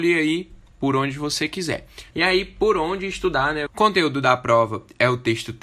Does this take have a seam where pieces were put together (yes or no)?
yes